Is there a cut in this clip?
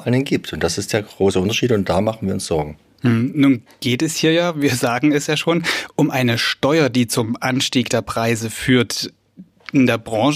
no; 0 cuts

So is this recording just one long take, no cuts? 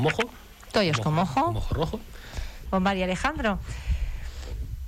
no; 1 cut; at 2.7 s

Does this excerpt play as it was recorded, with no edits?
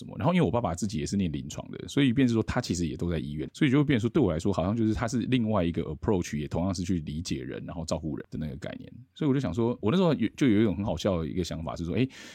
no; 2 cuts; at 3.5 s, 8.2 s

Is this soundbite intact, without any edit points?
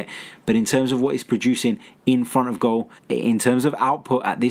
no; 1 cut; at 3.0 s

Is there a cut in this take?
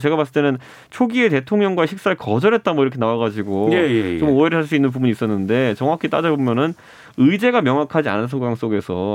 no; 0 cuts

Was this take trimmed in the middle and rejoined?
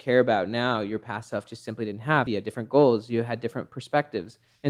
yes; 1 cut; at 2.3 s

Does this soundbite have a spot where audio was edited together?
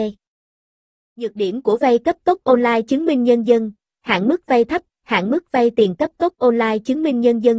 no; 0 cuts

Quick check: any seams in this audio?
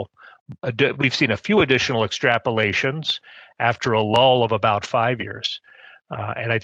no; 0 cuts

